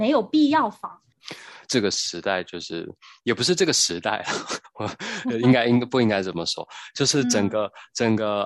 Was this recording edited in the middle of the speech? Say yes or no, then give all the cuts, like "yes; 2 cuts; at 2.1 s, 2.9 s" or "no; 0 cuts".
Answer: yes; 1 cut; at 1.6 s